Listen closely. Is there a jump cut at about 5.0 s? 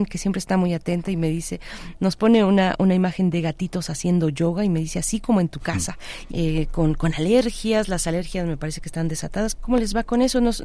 no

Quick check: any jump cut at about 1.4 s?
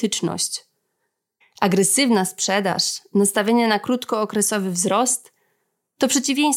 yes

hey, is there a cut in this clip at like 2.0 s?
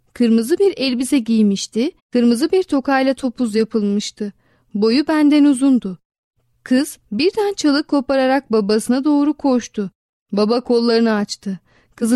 yes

